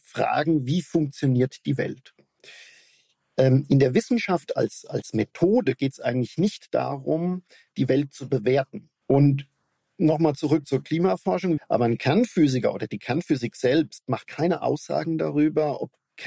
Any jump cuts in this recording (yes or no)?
yes